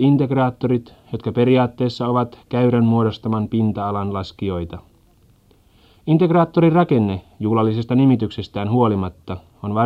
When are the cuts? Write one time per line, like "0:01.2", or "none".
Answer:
none